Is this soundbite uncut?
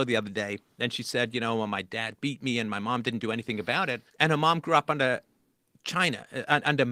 no; 1 cut; at 4.1 s

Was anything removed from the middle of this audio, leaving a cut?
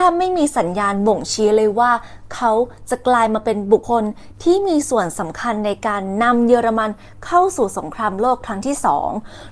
yes; 1 cut; at 3.8 s

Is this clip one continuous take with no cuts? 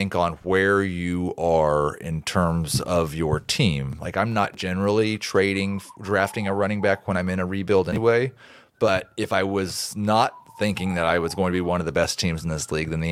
yes; 0 cuts

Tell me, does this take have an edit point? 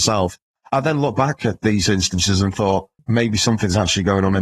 yes; 1 cut; at 3.0 s

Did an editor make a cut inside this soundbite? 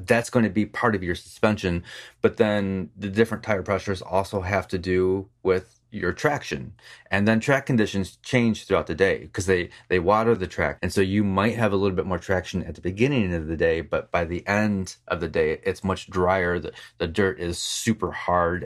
yes; 1 cut; at 10.8 s

